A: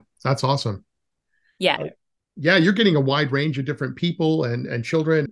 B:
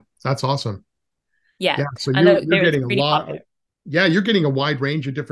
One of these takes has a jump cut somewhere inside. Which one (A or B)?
A